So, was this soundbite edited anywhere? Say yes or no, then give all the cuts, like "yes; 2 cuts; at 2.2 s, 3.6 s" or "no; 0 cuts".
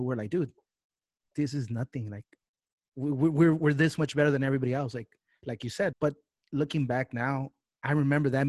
yes; 1 cut; at 5.9 s